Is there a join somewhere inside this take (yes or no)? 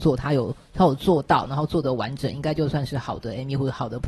no